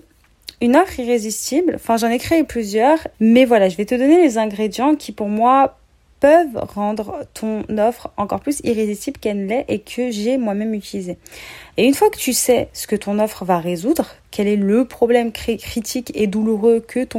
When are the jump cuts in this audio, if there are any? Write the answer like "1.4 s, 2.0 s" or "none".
3.1 s, 11.7 s